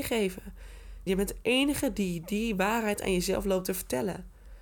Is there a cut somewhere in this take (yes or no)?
yes